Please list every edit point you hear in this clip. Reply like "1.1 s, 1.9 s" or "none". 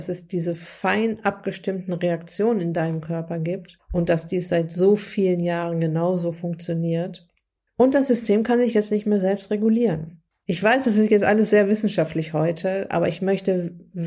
7.7 s, 10.4 s